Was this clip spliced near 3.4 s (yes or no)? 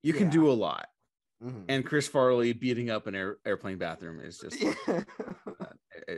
yes